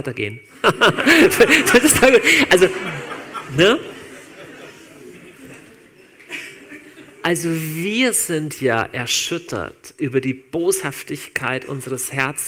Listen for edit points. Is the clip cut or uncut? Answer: uncut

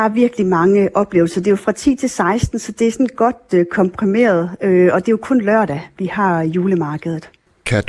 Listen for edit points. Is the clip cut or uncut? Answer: uncut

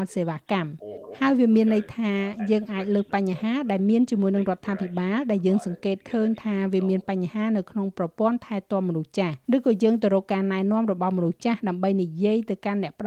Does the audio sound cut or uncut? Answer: cut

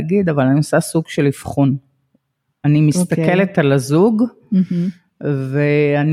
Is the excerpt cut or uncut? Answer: uncut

